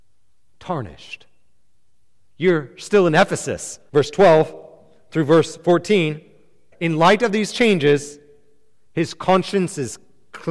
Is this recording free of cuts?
no; 2 cuts; at 3.9 s, 6.7 s

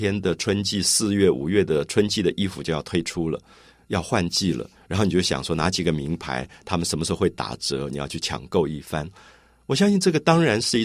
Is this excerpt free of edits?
yes; 0 cuts

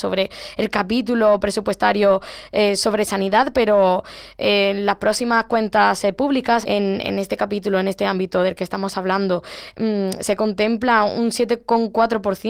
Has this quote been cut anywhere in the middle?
yes; 1 cut; at 6.6 s

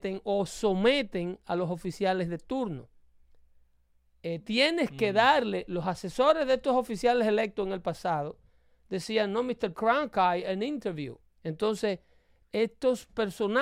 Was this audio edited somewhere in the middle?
yes; 2 cuts; at 9.7 s, 11.2 s

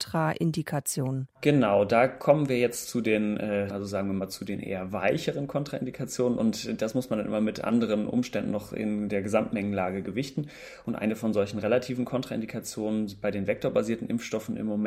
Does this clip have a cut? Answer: yes; 2 cuts; at 1.4 s, 3.7 s

